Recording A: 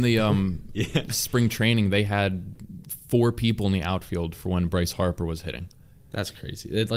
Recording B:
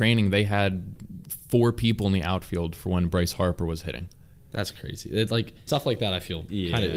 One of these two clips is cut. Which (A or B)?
B